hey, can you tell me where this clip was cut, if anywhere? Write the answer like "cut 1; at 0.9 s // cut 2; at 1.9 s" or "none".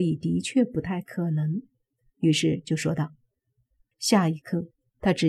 cut 1; at 3.9 s